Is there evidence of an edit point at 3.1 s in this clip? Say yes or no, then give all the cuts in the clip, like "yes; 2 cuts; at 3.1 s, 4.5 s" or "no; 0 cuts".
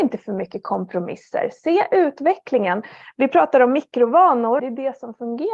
no; 1 cut; at 4.6 s